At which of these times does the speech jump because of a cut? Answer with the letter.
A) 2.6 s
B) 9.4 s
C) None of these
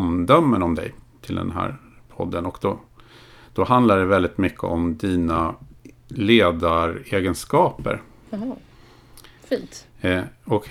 B